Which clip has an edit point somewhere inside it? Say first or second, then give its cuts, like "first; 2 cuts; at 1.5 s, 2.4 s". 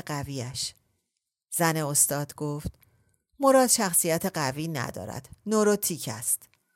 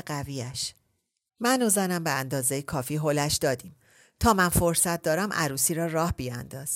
second; 1 cut; at 1.3 s